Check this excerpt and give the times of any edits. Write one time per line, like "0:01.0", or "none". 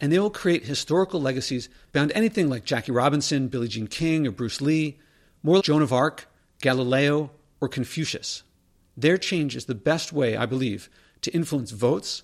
0:05.6
0:08.8

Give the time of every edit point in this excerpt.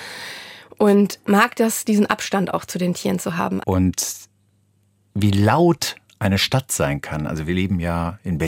0:03.6

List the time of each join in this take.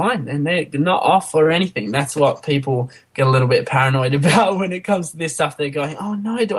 none

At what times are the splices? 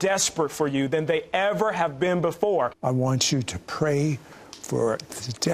0:02.7

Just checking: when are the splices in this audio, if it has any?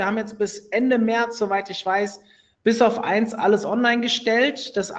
none

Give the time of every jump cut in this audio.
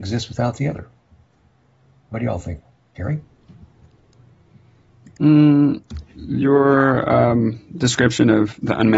none

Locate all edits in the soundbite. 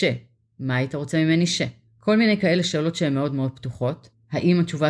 none

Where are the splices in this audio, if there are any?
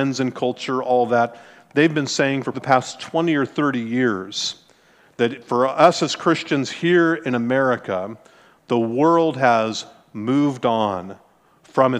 0:02.5

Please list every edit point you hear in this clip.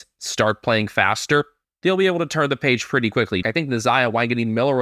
0:03.4

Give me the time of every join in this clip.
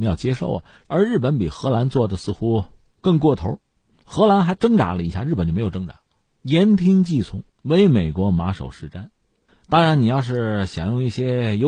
none

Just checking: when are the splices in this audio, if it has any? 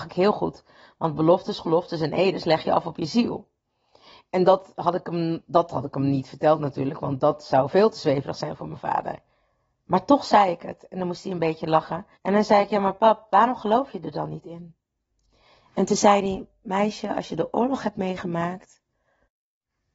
0:12.1

